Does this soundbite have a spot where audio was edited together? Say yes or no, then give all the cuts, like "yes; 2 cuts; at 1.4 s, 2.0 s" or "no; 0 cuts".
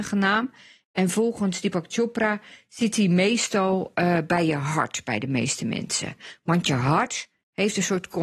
no; 0 cuts